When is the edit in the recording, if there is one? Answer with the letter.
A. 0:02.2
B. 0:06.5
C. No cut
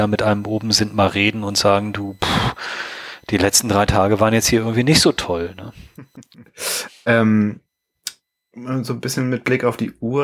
B